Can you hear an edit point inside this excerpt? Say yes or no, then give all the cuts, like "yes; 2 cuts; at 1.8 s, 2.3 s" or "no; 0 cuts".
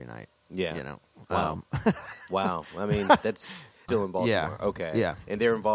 yes; 1 cut; at 3.9 s